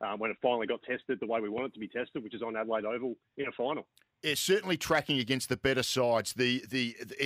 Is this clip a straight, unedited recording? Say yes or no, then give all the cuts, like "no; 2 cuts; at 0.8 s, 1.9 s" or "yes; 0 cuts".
yes; 0 cuts